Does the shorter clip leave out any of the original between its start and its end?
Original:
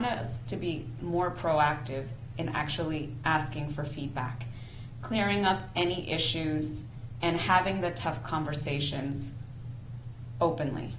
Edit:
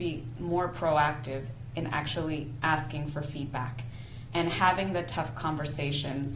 yes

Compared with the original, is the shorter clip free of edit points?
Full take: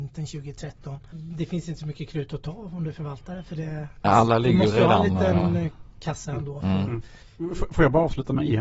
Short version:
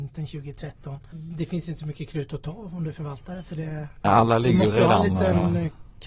yes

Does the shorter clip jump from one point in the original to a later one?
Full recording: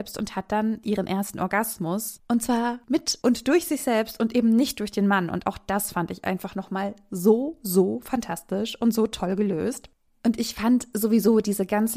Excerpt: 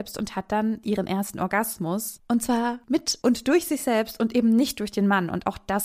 no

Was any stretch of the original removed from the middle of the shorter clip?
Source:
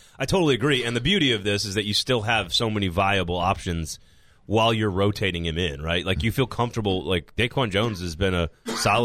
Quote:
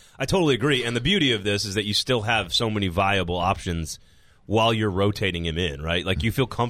no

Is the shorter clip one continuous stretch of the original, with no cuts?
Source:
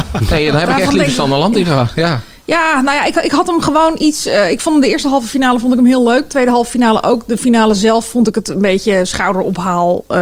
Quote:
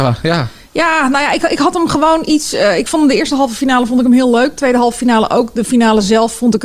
yes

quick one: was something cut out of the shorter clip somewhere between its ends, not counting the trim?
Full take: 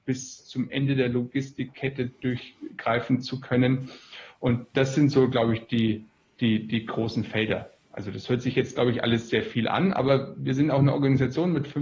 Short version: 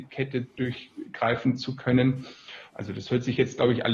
yes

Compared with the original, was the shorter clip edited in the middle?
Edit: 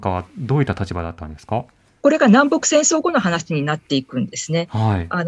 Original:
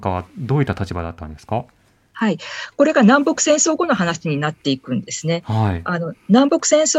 yes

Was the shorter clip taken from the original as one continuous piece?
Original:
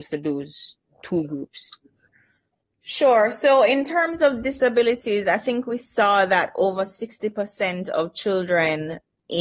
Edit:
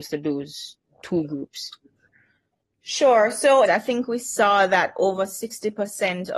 no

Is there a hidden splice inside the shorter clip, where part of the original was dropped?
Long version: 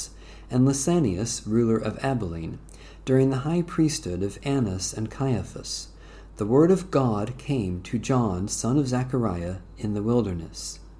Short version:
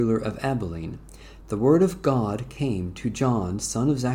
yes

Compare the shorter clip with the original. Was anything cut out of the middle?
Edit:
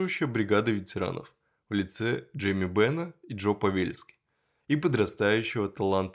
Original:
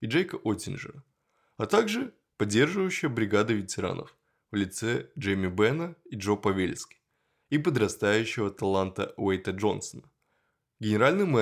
no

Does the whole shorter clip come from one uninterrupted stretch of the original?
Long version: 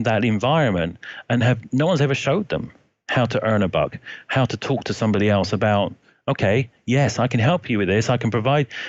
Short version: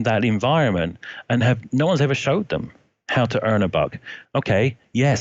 no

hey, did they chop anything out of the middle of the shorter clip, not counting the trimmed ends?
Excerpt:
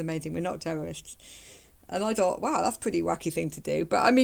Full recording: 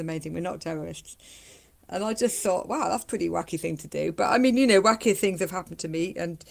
yes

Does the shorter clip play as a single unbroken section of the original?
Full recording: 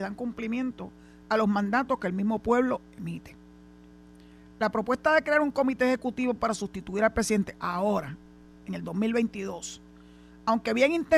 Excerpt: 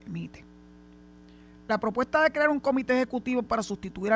yes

